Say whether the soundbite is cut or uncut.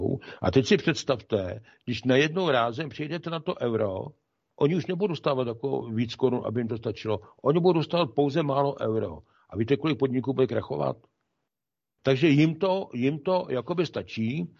cut